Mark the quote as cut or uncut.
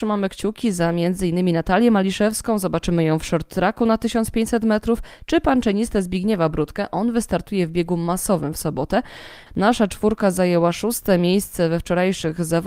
cut